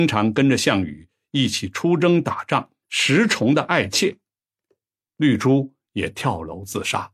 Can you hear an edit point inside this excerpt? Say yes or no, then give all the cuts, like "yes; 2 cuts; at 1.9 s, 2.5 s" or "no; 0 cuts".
yes; 2 cuts; at 2.8 s, 5.1 s